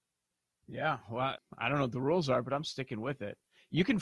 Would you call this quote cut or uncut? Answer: cut